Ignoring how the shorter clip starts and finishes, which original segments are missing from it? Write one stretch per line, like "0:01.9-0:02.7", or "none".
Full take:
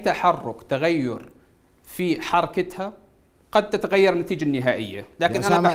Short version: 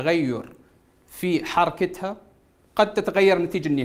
none